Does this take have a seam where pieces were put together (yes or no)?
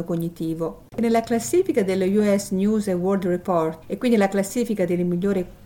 yes